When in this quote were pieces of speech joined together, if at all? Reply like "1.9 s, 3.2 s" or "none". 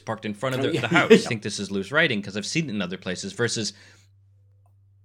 1.2 s